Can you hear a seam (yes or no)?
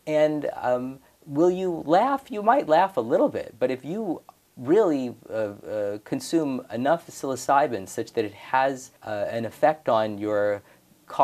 yes